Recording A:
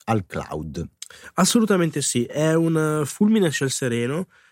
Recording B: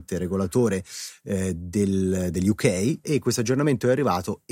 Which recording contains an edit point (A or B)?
B